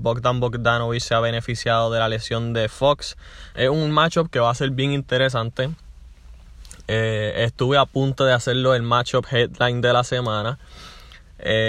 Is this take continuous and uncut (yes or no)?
no